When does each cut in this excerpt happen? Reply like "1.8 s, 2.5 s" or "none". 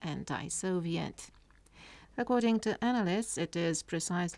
2.0 s